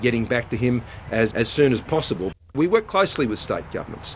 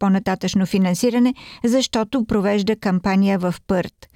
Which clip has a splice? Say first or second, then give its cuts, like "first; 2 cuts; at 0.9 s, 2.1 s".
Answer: first; 2 cuts; at 1.3 s, 2.5 s